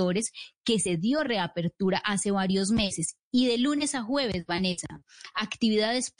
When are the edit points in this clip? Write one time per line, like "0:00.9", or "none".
none